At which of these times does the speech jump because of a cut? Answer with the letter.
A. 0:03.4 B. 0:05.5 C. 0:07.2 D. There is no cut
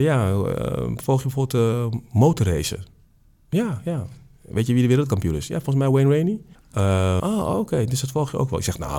C